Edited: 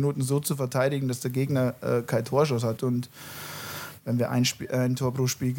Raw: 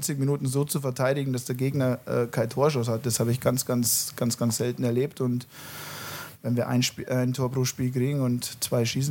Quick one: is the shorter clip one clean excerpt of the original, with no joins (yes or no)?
no